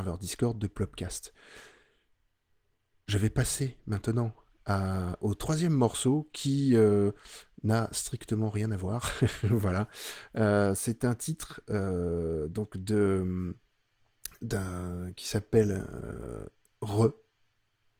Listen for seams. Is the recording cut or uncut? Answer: uncut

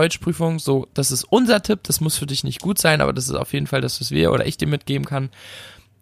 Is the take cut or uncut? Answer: uncut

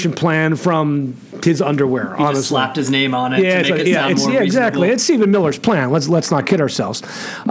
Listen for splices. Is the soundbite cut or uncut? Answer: uncut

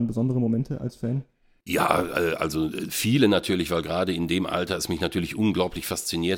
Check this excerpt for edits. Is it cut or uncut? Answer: uncut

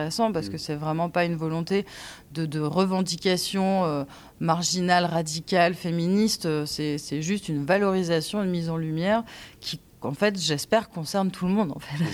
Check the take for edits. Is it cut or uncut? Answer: uncut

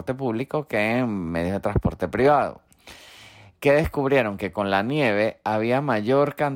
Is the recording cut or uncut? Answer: uncut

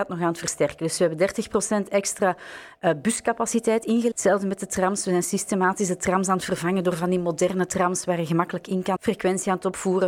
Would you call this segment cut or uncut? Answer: cut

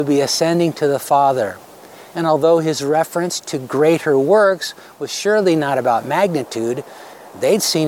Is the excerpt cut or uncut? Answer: uncut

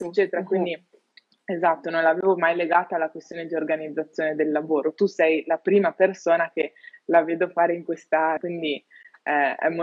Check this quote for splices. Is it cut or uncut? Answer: cut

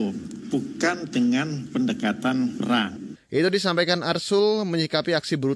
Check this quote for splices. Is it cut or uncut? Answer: cut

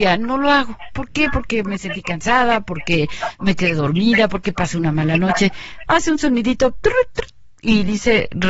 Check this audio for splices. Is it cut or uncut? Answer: cut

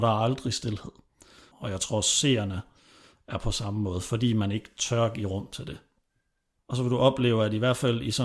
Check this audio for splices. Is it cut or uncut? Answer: cut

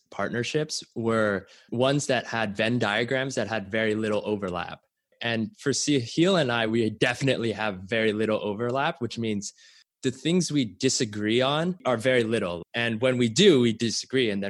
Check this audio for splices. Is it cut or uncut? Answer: uncut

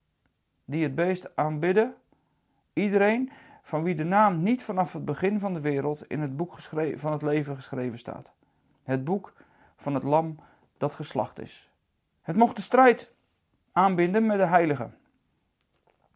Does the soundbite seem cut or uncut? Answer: cut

